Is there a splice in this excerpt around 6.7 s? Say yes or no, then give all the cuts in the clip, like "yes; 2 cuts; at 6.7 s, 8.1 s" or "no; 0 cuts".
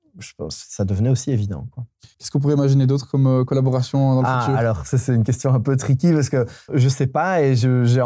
yes; 1 cut; at 6.7 s